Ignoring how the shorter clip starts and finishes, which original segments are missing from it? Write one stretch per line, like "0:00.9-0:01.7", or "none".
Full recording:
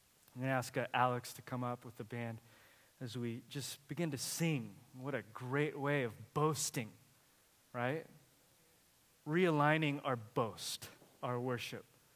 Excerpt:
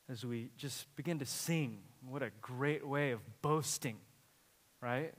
none